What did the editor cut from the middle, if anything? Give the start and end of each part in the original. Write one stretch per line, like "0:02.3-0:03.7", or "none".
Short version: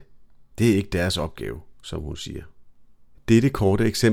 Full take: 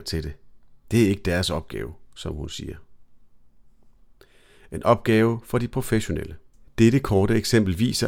0:03.5-0:06.6